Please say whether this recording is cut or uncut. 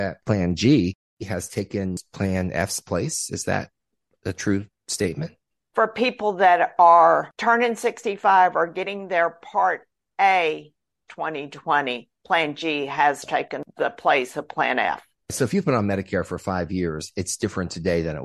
cut